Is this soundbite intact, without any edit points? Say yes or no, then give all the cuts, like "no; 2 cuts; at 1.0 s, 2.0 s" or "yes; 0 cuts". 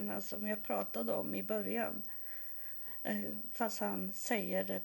yes; 0 cuts